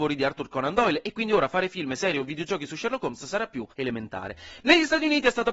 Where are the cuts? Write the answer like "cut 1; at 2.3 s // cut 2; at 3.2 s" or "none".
cut 1; at 3.7 s

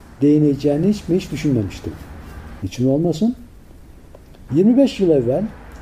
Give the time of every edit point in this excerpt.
cut 1; at 2.6 s // cut 2; at 4.5 s

